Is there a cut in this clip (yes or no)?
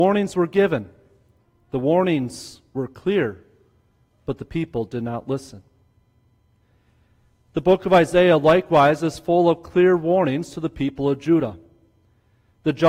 no